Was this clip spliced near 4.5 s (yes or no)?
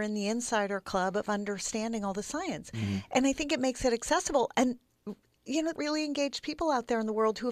no